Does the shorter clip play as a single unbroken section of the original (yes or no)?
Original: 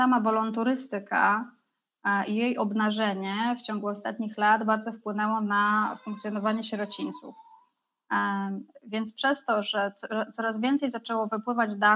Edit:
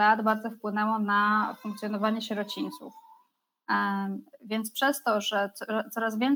yes